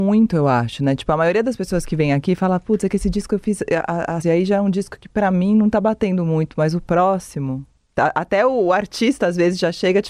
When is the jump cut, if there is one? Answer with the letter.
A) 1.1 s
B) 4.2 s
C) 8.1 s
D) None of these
B